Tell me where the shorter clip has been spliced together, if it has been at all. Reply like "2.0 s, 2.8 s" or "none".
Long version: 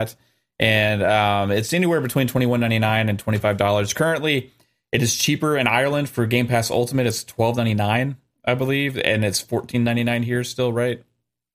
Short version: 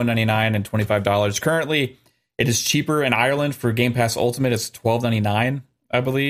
none